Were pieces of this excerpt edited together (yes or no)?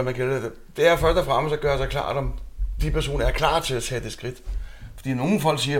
no